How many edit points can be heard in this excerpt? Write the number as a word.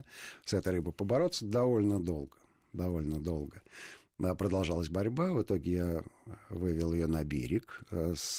zero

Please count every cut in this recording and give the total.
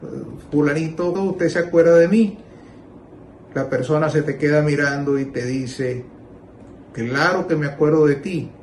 one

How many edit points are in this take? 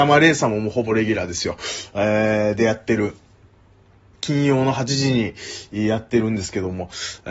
one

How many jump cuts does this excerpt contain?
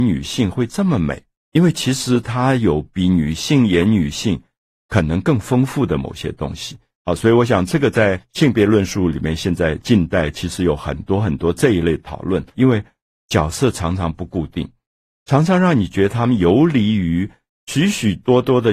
one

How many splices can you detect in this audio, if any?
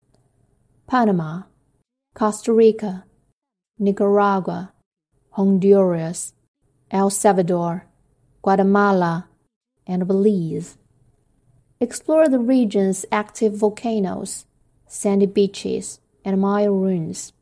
zero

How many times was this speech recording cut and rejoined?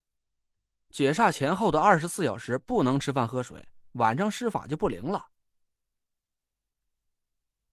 one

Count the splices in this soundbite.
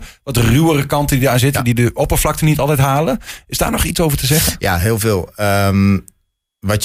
zero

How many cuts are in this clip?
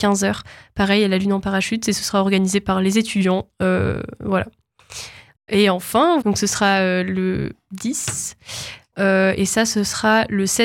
two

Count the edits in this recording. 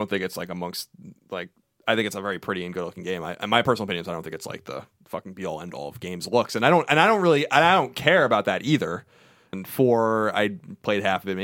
one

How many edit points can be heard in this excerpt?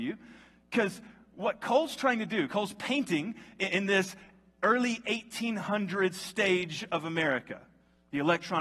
zero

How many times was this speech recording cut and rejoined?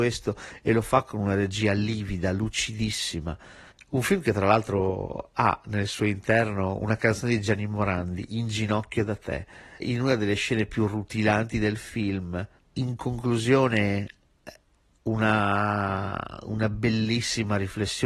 three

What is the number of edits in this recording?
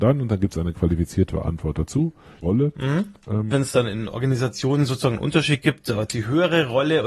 two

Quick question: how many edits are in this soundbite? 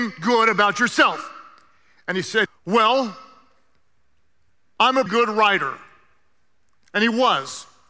two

